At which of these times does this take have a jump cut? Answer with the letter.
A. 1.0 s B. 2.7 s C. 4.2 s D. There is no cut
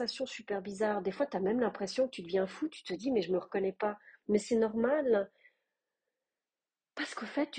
D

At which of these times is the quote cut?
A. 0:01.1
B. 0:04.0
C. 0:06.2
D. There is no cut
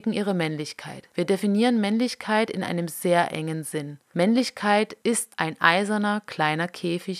D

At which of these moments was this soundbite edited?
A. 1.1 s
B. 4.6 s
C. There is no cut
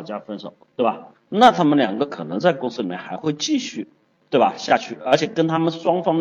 A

